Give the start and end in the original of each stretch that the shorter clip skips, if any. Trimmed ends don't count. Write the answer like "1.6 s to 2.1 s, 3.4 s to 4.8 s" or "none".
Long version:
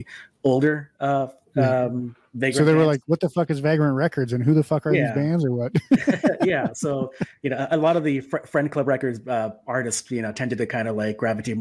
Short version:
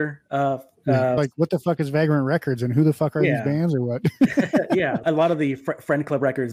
1.9 s to 2.9 s, 6.7 s to 7.7 s

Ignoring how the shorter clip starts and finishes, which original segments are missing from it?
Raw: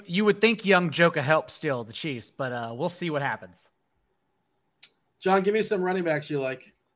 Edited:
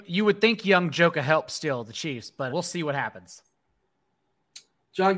2.5 s to 2.8 s

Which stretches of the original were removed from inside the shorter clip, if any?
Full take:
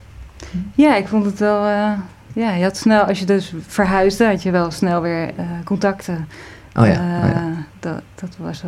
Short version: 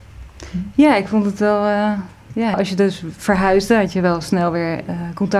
2.5 s to 3.0 s

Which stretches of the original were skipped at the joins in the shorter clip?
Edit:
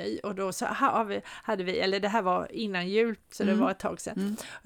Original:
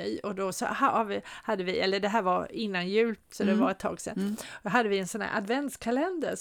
none

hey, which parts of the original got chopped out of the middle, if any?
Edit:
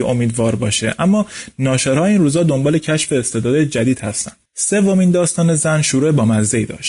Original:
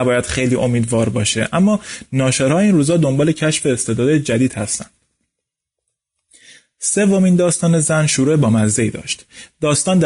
5.0 s to 6.7 s

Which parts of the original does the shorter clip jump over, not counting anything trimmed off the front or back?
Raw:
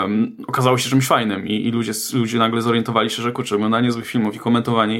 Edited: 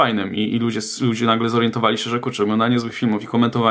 none

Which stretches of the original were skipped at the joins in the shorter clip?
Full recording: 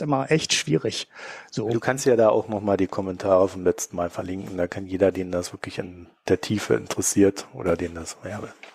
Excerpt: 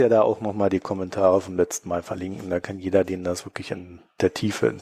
none

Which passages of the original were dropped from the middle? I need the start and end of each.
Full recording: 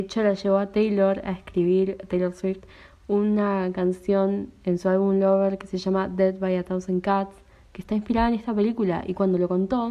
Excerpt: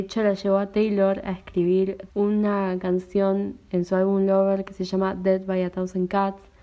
2.1 s to 3.0 s

